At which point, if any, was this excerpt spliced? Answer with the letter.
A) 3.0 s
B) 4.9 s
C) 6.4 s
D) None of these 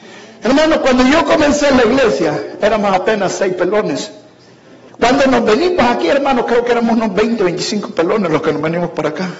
B